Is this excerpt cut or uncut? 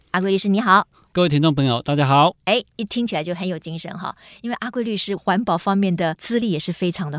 cut